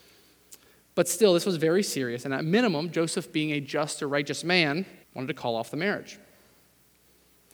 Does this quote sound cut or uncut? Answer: cut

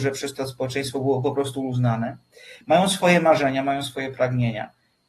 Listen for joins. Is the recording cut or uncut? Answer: uncut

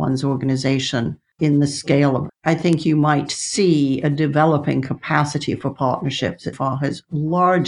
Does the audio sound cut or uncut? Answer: cut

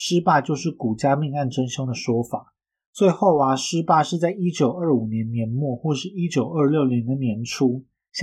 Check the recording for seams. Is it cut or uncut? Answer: uncut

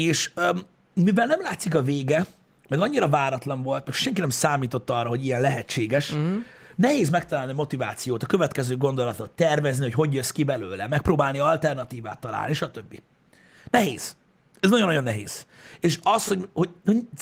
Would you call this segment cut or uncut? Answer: uncut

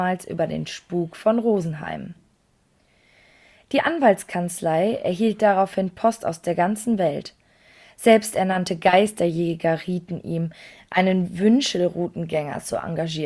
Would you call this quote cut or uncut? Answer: uncut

